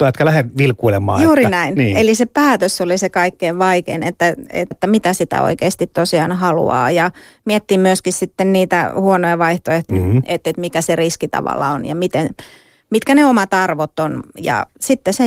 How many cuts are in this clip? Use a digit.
2